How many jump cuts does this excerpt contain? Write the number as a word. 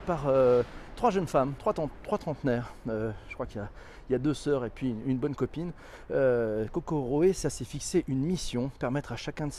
zero